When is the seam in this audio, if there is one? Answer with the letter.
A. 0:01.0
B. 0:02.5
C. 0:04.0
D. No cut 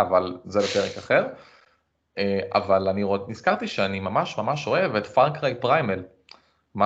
D